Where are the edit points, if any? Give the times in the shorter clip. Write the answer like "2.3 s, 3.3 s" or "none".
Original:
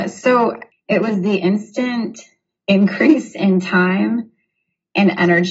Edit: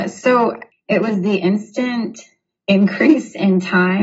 none